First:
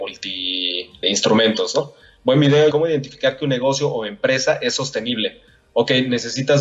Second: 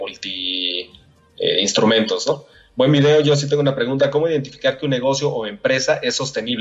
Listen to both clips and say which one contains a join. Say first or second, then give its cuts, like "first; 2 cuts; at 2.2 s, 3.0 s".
first; 2 cuts; at 1.0 s, 2.7 s